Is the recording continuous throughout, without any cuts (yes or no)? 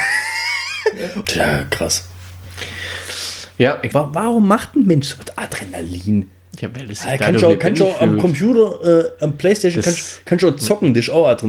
no